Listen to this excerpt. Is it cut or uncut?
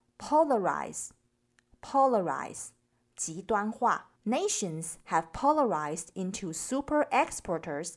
cut